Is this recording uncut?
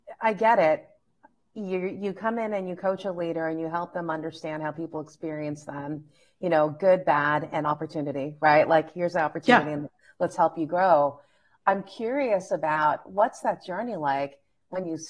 yes; 0 cuts

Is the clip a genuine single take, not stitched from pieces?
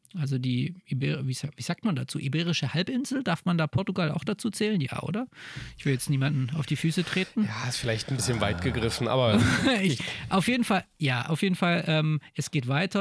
yes; 0 cuts

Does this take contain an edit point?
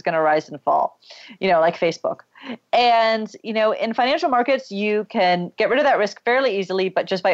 no; 0 cuts

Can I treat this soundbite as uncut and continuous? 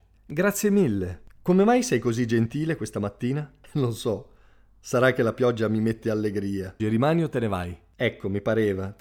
no; 1 cut; at 6.8 s

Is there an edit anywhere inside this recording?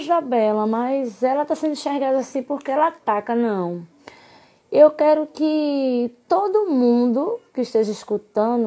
no; 0 cuts

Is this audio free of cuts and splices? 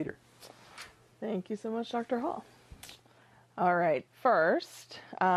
no; 1 cut; at 4.1 s

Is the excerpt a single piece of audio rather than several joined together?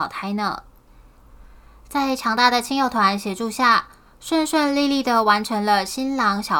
yes; 0 cuts

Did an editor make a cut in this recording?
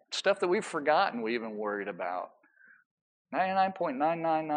no; 0 cuts

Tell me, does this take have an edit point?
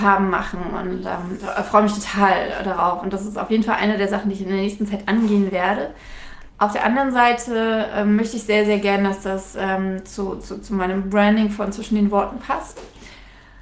yes; 1 cut; at 6.5 s

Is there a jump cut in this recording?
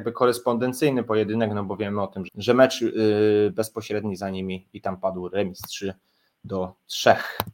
yes; 1 cut; at 2.3 s

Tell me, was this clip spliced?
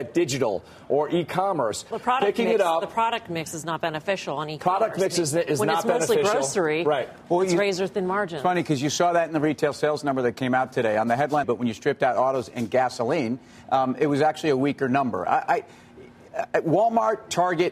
yes; 2 cuts; at 1.9 s, 11.4 s

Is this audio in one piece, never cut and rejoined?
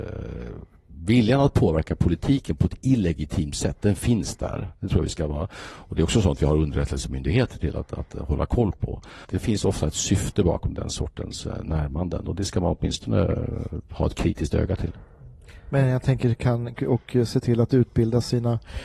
no; 2 cuts; at 9.2 s, 16.8 s

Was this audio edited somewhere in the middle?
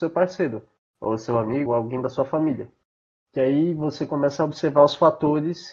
yes; 1 cut; at 1.7 s

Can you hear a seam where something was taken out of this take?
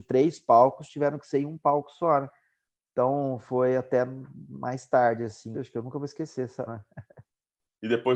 yes; 2 cuts; at 5.5 s, 6.7 s

